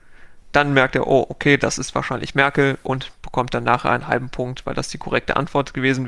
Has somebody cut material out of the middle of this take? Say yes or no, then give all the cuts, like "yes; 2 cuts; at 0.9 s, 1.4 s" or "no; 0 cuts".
no; 0 cuts